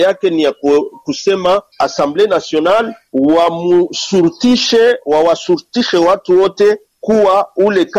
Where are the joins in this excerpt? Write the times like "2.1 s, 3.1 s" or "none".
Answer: 1.7 s